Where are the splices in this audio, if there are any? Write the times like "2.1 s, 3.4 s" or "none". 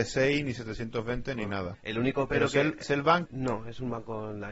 1.7 s, 3.3 s